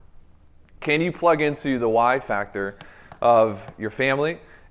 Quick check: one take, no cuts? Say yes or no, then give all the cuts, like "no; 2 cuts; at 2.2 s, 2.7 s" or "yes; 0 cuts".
yes; 0 cuts